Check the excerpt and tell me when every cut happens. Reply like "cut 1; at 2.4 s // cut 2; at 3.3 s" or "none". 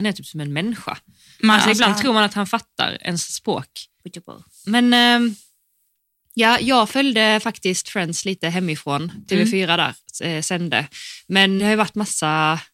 cut 1; at 4.0 s // cut 2; at 11.6 s